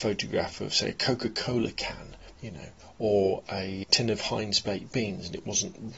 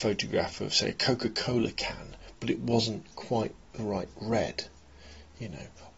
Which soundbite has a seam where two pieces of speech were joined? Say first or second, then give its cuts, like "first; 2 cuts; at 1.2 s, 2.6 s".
first; 2 cuts; at 2.4 s, 3.8 s